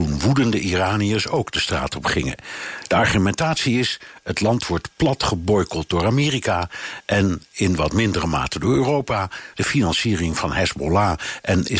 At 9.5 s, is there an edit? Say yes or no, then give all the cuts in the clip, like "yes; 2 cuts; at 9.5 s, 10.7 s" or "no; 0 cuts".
yes; 1 cut; at 9.5 s